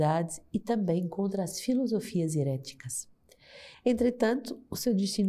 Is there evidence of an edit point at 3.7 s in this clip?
yes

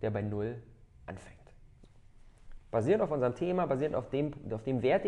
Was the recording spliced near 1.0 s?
no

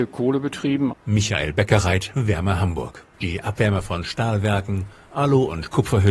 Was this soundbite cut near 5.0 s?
no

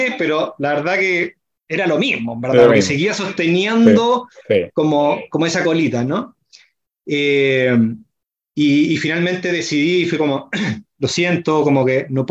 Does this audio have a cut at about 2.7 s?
no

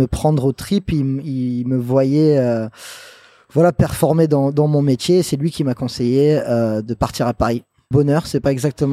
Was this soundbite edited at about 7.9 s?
yes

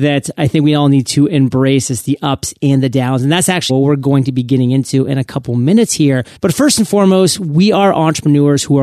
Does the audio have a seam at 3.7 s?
yes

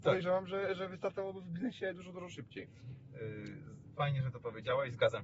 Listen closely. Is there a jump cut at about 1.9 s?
no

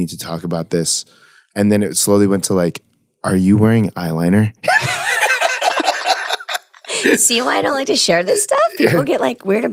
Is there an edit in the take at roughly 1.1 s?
no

